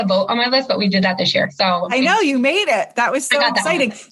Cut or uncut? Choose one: uncut